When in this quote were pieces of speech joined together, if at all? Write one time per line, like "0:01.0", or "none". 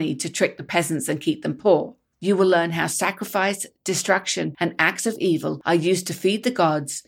0:02.1